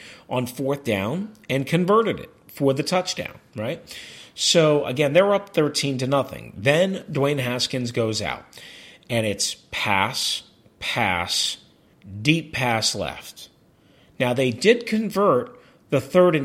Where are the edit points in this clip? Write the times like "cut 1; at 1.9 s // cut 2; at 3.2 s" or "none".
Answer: none